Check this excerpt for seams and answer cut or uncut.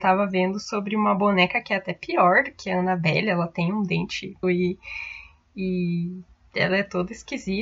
cut